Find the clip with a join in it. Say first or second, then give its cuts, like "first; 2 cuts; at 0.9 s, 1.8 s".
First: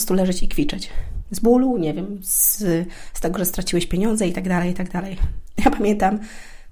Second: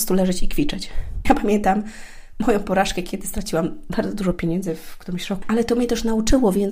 second; 2 cuts; at 1.2 s, 5.4 s